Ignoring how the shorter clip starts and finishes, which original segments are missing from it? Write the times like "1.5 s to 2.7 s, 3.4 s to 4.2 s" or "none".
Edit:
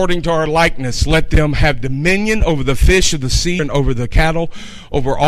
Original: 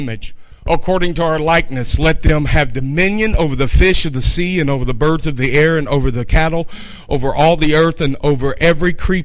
4.5 s to 5.8 s